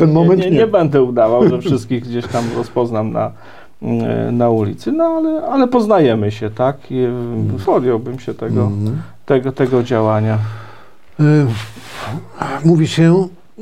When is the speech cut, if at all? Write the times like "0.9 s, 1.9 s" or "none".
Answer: 7.6 s